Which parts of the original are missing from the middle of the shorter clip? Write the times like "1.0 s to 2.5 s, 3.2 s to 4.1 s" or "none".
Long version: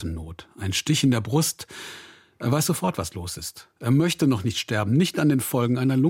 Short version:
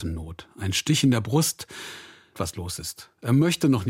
2.3 s to 2.9 s